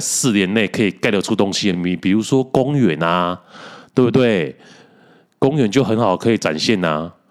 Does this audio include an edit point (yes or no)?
no